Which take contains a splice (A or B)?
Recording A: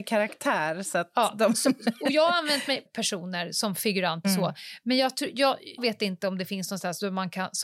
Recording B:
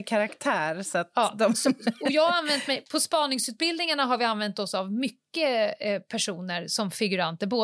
A